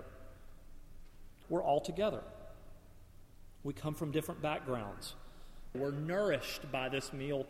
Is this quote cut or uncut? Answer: cut